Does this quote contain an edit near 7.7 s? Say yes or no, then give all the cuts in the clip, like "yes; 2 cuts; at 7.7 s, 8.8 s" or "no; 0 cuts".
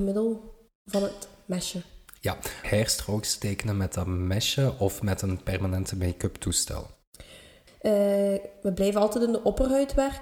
yes; 2 cuts; at 2.6 s, 7.7 s